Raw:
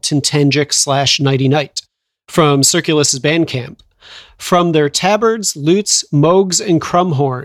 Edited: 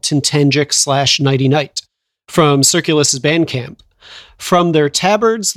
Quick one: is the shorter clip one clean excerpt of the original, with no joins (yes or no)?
yes